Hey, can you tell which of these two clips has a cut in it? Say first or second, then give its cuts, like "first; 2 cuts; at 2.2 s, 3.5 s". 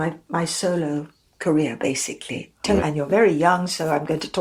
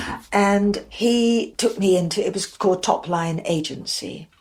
first; 1 cut; at 2.8 s